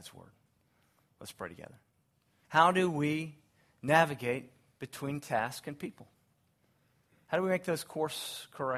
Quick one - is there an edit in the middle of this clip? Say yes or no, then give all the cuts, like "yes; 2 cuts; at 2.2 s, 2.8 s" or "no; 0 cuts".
yes; 1 cut; at 2.4 s